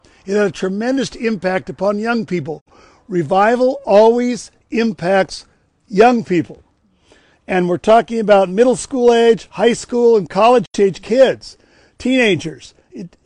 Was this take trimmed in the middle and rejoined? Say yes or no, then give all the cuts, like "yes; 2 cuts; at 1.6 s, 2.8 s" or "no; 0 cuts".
no; 0 cuts